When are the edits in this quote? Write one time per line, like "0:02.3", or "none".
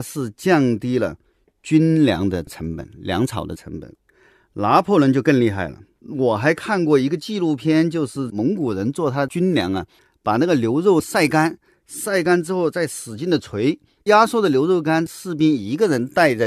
0:06.0
0:14.0